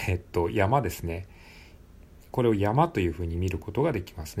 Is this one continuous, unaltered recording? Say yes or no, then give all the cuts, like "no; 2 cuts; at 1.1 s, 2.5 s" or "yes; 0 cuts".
yes; 0 cuts